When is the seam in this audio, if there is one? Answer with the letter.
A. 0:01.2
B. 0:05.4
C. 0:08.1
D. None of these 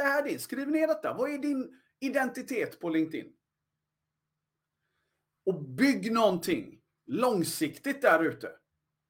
B